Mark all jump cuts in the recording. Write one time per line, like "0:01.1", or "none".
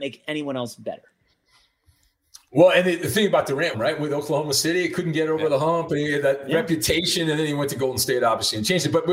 0:03.7

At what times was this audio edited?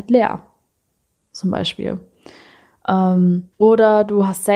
0:03.5

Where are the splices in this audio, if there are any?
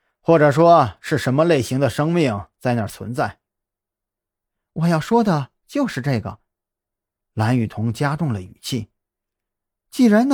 none

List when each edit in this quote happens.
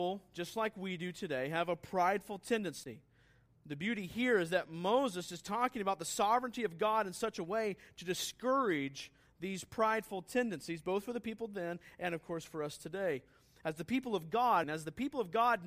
0:14.6

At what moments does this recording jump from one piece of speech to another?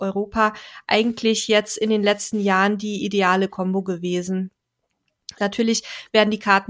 0:05.4

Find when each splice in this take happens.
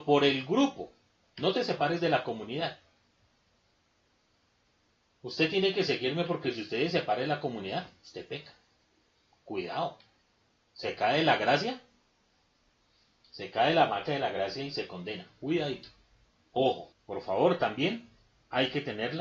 0:01.2
0:16.9

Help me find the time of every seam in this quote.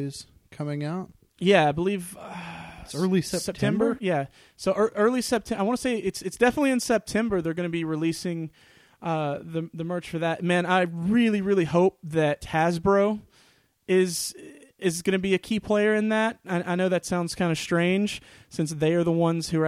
none

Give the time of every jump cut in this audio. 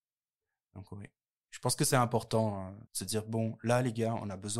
0:02.9

